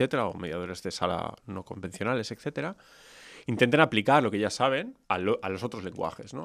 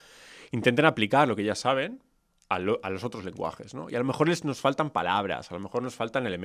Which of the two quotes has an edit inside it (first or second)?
first